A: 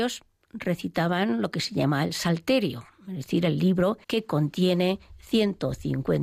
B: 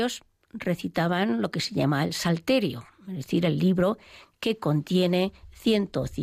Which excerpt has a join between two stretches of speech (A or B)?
A